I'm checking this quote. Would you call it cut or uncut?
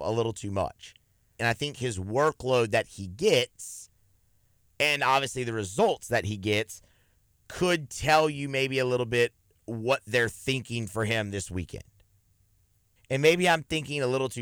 cut